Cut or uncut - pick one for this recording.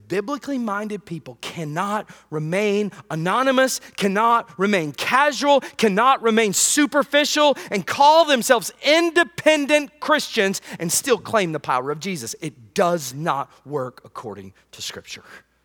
uncut